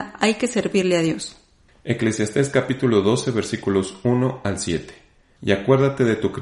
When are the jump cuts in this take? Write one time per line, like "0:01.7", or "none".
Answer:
none